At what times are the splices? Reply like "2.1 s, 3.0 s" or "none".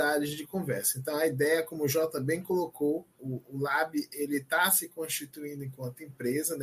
none